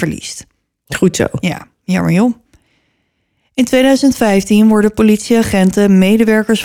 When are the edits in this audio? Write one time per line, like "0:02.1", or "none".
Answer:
none